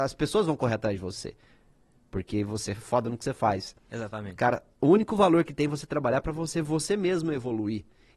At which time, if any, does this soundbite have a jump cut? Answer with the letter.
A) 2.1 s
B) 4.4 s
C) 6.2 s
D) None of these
D